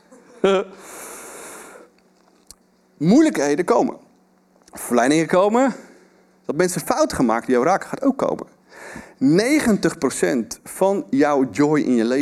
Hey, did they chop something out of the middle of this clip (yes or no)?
no